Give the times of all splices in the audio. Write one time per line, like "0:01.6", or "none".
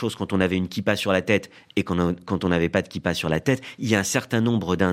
none